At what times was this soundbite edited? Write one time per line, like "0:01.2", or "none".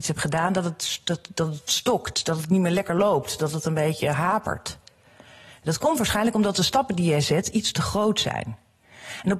none